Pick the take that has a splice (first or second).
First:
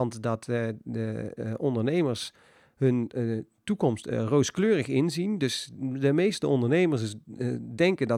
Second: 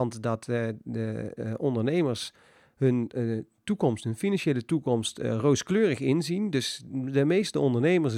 first